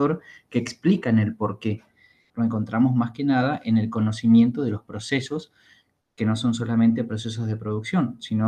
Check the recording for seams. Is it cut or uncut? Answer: cut